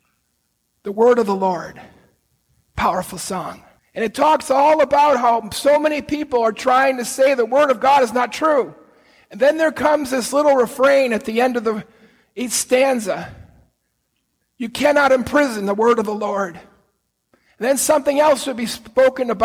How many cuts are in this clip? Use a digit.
1